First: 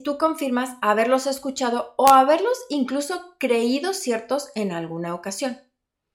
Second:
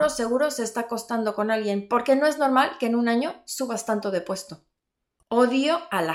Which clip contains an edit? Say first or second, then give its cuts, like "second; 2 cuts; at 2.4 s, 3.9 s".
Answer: second; 1 cut; at 5.2 s